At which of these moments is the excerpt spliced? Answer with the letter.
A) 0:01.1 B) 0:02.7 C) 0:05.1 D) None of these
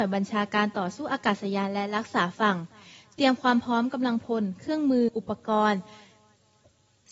C